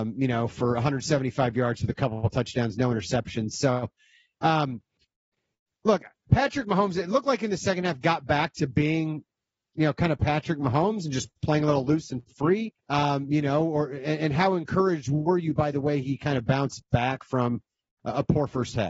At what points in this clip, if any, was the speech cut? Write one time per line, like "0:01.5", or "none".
0:12.8